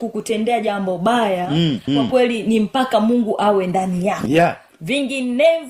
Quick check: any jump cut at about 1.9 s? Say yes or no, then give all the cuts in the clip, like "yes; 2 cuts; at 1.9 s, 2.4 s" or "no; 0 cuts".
yes; 1 cut; at 1.9 s